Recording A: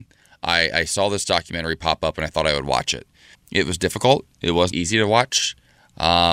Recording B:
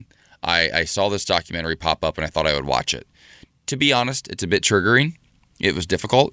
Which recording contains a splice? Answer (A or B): A